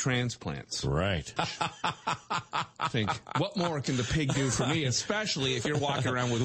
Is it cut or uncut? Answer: cut